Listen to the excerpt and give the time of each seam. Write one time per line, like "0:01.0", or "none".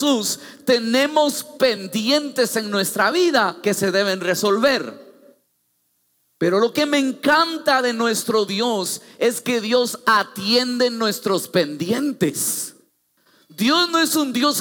none